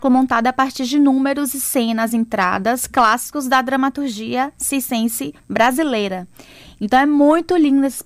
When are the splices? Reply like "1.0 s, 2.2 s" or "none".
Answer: none